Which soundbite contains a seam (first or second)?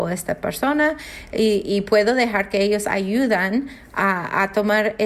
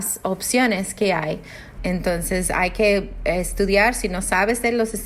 second